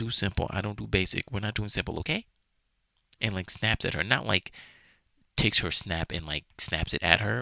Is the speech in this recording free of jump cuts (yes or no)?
yes